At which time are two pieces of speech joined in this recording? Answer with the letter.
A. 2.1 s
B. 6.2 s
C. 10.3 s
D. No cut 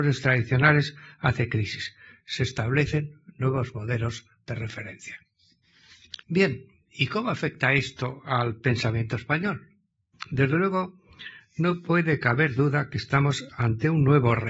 B